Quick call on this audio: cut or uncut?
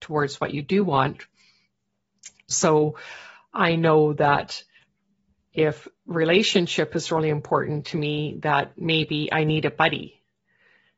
cut